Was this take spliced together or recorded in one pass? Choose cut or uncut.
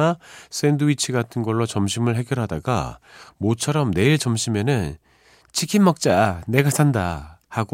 uncut